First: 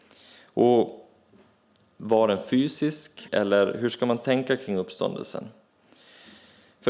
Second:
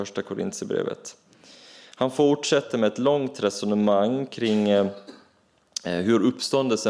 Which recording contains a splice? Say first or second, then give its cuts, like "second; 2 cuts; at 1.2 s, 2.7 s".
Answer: first; 1 cut; at 3.3 s